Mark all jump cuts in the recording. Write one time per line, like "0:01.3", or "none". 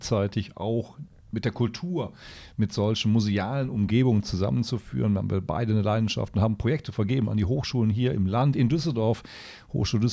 none